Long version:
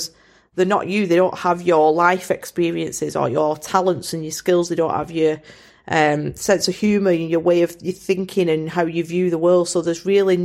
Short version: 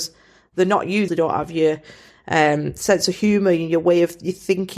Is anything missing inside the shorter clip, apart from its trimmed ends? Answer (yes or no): yes